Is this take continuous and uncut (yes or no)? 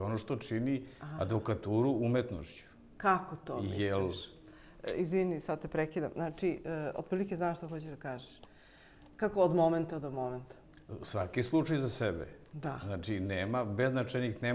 yes